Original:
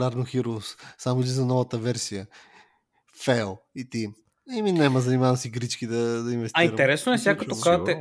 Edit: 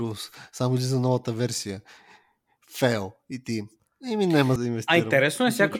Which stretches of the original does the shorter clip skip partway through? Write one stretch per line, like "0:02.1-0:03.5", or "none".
0:05.0-0:06.2